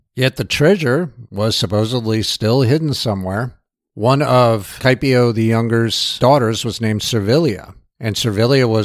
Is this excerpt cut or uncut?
uncut